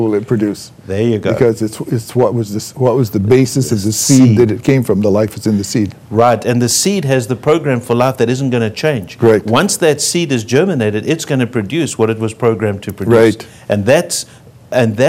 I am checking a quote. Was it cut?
no; 0 cuts

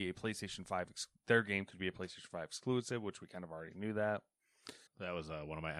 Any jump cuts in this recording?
yes; 1 cut; at 4.9 s

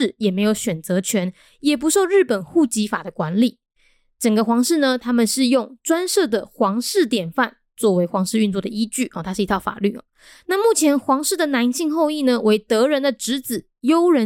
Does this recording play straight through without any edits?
yes; 0 cuts

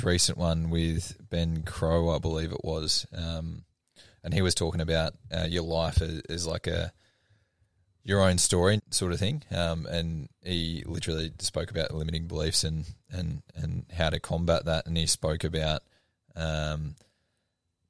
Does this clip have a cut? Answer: yes; 1 cut; at 8.8 s

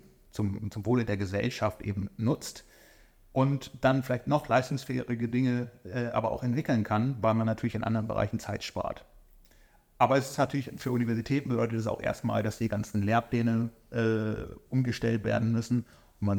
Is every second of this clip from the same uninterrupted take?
yes; 0 cuts

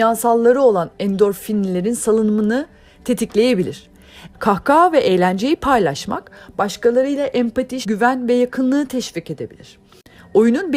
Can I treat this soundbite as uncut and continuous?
no; 2 cuts; at 4.3 s, 7.8 s

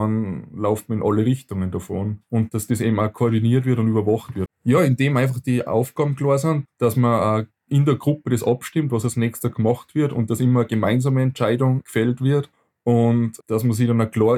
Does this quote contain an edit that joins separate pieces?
yes; 2 cuts; at 4.5 s, 6.6 s

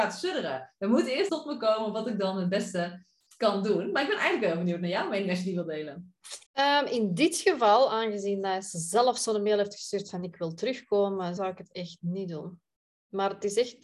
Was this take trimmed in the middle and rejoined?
yes; 3 cuts; at 1.3 s, 6.5 s, 11.4 s

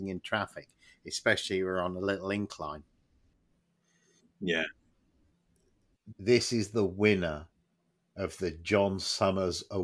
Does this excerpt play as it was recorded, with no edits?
no; 1 cut; at 6.1 s

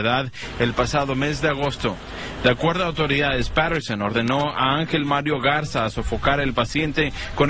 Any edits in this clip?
no; 0 cuts

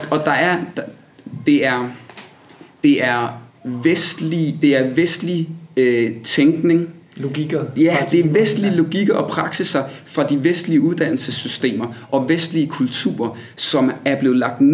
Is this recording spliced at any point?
no; 0 cuts

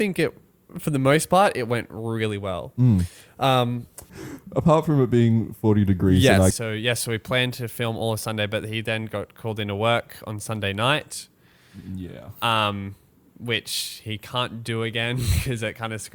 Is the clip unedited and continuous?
no; 2 cuts; at 4.1 s, 6.5 s

